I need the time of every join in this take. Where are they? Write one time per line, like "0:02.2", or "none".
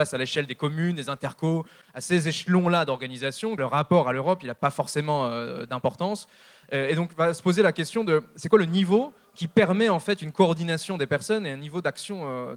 0:03.6